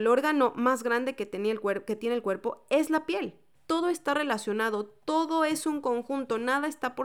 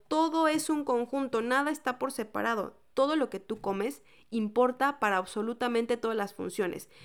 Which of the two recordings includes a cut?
first; 1 cut; at 3.5 s

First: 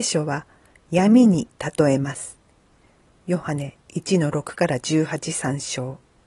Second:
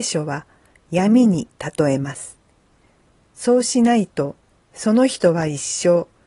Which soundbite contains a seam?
second; 1 cut; at 3.2 s

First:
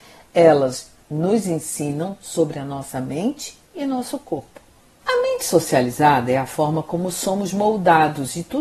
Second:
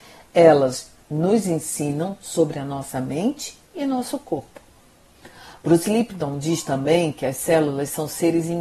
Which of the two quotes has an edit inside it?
first; 1 cut; at 5.0 s

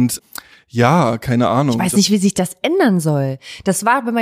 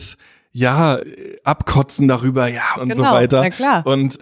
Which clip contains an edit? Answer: second; 1 cut; at 2.8 s

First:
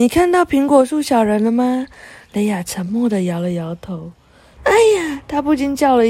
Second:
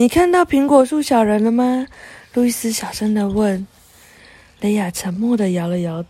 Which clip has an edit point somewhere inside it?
first; 2 cuts; at 2.2 s, 4.6 s

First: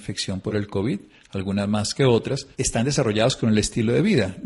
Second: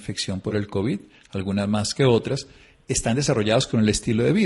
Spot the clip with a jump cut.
first; 1 cut; at 2.5 s

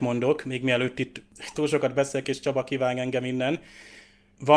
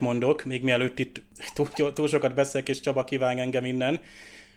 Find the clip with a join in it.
first; 1 cut; at 1.5 s

